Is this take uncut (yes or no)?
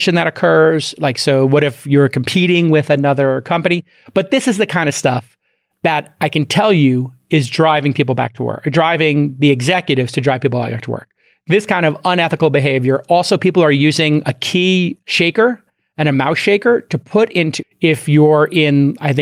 no